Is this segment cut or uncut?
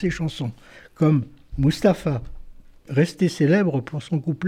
cut